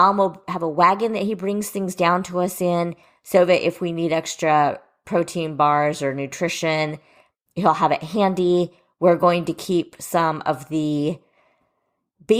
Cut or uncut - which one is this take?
uncut